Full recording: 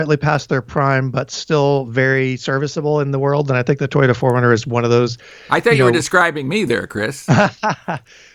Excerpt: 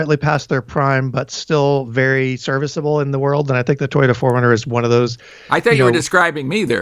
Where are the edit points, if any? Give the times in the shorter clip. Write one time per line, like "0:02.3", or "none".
none